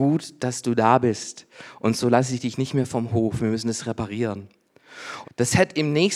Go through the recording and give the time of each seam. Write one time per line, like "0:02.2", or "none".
0:05.2